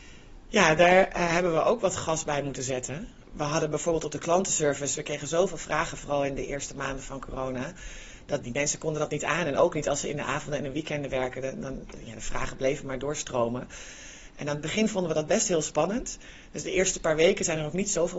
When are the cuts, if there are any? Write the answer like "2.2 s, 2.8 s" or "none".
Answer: 8.4 s, 14.3 s